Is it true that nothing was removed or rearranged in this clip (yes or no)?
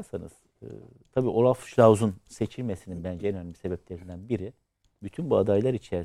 yes